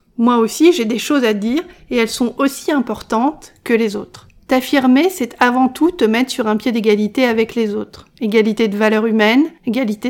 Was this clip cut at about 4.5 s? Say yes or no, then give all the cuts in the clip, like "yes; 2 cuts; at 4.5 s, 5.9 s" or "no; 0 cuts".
no; 0 cuts